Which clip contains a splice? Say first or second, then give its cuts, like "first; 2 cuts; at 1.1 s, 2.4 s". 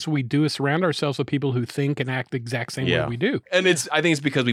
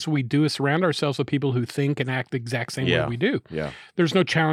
first; 1 cut; at 3.4 s